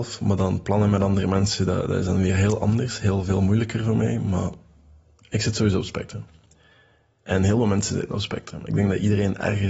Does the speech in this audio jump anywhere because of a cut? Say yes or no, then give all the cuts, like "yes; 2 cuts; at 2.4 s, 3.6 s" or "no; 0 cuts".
no; 0 cuts